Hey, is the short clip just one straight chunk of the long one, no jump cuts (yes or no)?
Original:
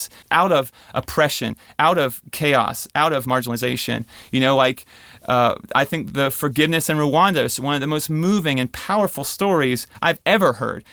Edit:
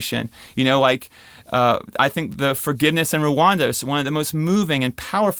yes